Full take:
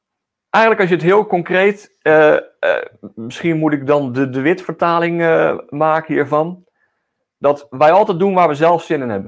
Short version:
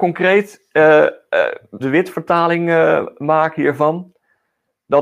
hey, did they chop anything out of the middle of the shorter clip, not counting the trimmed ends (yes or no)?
yes